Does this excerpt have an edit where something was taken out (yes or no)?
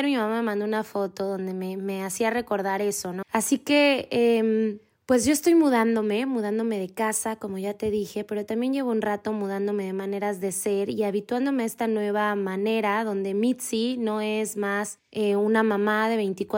yes